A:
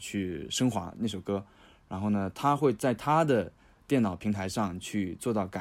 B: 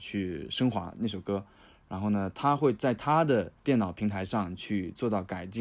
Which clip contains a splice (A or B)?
B